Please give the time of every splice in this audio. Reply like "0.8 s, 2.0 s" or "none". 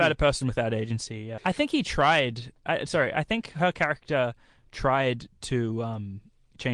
1.4 s